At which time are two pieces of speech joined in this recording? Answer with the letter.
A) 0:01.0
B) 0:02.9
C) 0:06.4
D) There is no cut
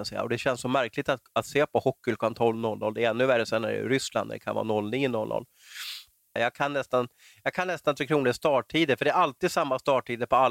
C